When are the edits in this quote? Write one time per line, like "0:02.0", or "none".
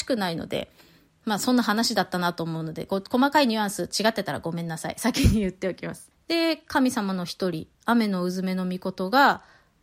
0:06.1
0:07.7